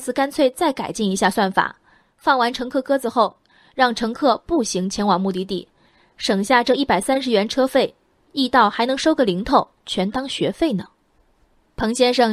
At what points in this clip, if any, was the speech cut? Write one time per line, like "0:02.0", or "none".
none

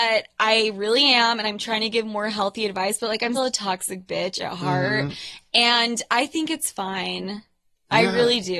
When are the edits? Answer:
0:03.4

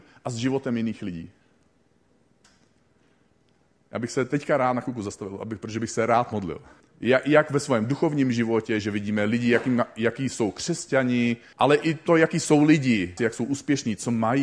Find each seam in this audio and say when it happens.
0:06.8
0:11.5
0:13.2

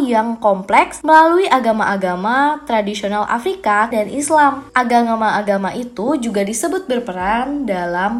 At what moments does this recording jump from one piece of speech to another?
0:03.9

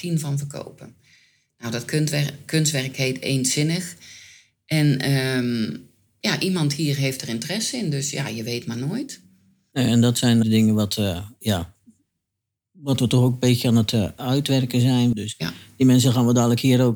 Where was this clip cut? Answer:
0:10.4
0:15.1

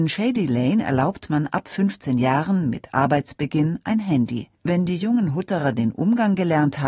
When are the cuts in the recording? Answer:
0:04.6

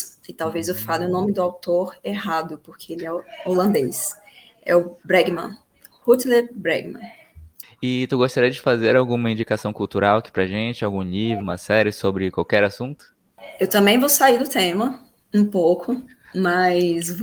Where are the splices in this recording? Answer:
0:07.6
0:11.4

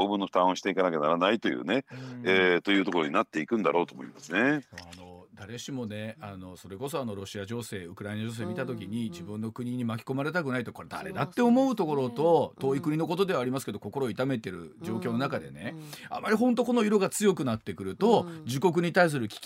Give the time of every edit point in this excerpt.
none

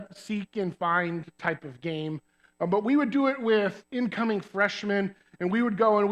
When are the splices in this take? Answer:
none

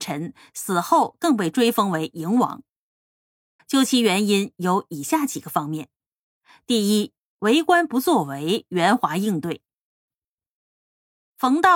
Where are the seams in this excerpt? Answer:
0:03.6
0:10.1

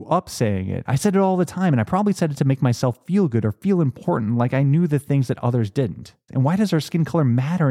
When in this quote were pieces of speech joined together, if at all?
0:06.3

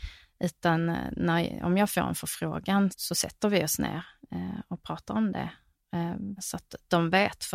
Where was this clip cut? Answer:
0:02.9
0:06.4

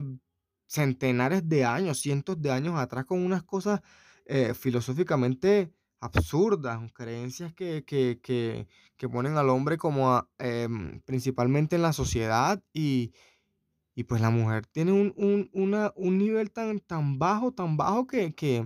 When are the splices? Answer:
none

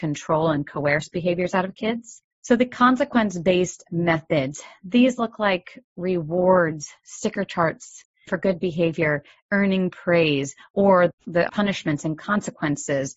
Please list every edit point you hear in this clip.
0:11.5

